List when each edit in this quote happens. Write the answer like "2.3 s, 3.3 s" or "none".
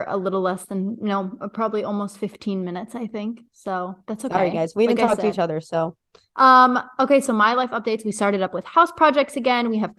none